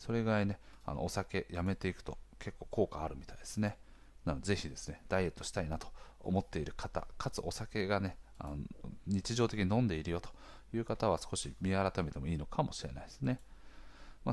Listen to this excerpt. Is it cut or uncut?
cut